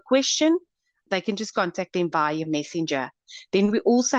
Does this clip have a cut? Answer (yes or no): yes